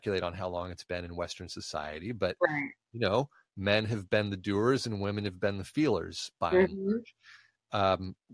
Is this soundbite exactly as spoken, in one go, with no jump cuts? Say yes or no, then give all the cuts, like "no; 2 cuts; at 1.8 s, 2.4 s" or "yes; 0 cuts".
yes; 0 cuts